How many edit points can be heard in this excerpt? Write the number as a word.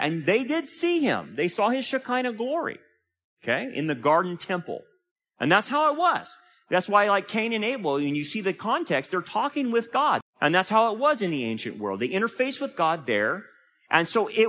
one